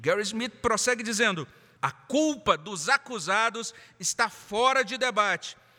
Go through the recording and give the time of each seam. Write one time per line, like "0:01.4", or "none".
0:01.8